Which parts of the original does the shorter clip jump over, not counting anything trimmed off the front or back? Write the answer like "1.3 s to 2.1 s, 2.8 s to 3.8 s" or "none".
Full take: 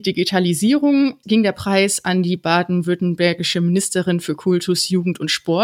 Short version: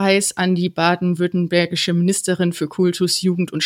none